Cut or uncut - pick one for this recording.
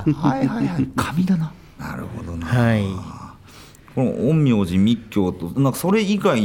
cut